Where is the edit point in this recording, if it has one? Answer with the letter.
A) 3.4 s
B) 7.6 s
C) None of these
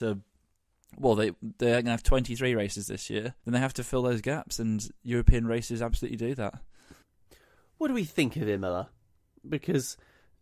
A